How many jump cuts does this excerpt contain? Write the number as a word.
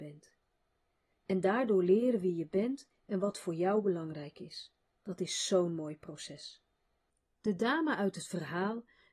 one